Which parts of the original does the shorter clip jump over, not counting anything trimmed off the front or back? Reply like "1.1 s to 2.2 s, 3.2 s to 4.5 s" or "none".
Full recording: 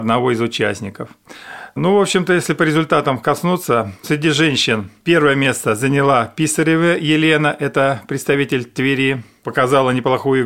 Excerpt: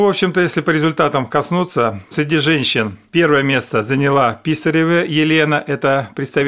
none